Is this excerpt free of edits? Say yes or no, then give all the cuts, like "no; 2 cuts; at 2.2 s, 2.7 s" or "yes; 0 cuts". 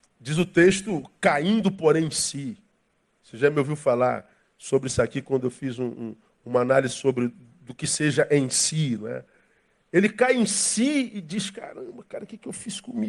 yes; 0 cuts